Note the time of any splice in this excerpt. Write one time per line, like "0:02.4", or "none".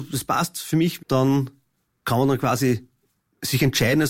0:01.0